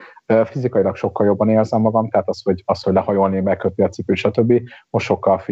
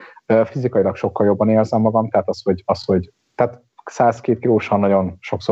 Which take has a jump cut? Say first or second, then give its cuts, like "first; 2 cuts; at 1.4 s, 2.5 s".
first; 1 cut; at 2.8 s